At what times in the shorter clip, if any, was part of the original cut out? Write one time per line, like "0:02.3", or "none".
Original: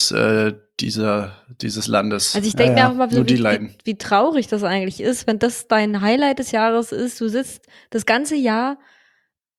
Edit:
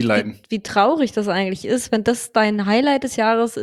none